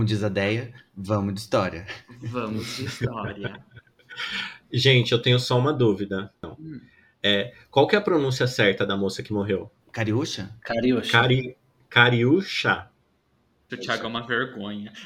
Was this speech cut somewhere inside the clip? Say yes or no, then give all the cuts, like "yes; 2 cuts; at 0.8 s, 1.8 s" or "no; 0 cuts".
yes; 3 cuts; at 6.4 s, 9.8 s, 13.7 s